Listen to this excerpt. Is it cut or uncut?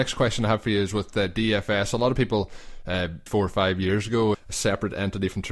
cut